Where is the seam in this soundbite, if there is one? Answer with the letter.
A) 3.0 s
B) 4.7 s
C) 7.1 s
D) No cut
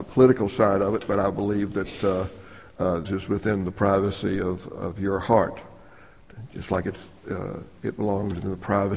A